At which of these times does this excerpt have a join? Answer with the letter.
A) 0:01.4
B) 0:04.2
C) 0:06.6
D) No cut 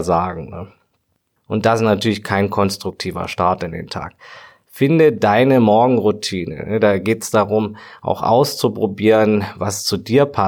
A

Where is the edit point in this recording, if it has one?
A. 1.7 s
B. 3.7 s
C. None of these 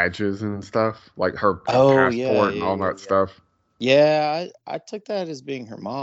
A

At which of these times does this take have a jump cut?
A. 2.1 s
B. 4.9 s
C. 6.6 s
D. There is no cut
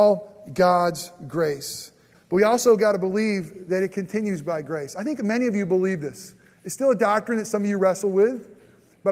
A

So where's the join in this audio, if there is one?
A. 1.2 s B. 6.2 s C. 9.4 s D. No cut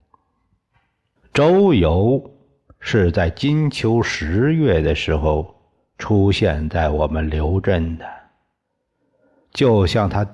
A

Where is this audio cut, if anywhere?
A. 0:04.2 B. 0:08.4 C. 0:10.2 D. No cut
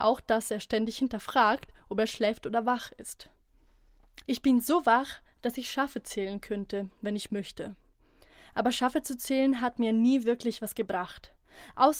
A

